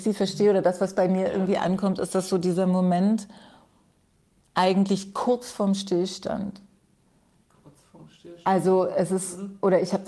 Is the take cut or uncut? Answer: uncut